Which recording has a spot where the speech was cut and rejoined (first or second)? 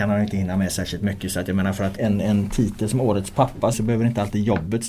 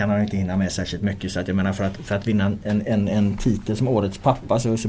first